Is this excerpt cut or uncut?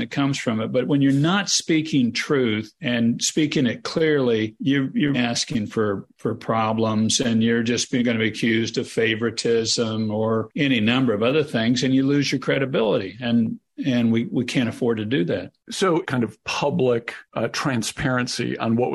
cut